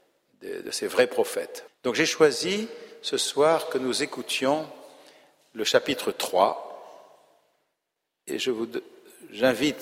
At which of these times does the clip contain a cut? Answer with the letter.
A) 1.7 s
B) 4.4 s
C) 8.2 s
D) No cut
A